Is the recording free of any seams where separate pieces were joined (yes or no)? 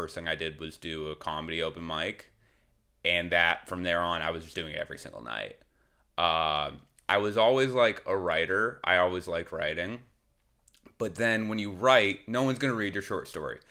yes